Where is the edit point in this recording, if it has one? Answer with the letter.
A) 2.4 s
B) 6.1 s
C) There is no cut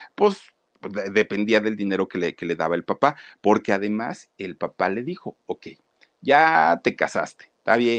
C